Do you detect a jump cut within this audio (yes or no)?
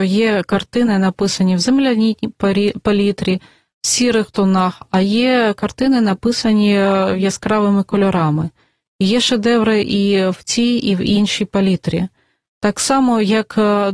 no